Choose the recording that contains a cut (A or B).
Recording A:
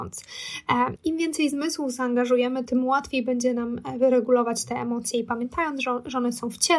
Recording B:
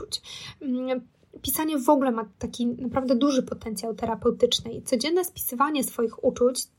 A